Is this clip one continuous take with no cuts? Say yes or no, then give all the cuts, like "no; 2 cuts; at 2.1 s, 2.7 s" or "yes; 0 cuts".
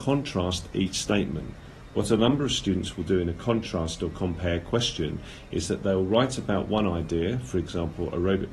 yes; 0 cuts